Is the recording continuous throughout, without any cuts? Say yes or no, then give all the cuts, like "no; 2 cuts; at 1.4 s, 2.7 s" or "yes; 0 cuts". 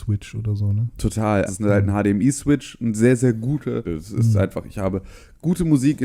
no; 2 cuts; at 1.5 s, 3.8 s